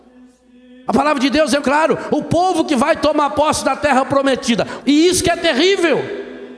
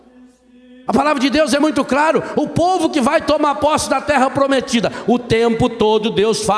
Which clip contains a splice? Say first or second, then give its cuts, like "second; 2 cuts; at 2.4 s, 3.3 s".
first; 2 cuts; at 1.6 s, 4.8 s